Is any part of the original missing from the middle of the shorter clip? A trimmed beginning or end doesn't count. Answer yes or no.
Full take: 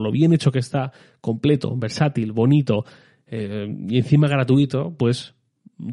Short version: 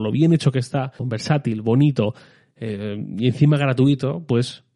yes